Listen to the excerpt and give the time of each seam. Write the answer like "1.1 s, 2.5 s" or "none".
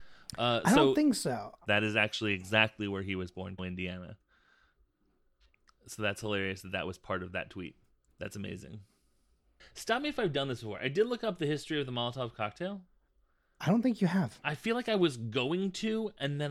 1.6 s, 3.6 s, 8.1 s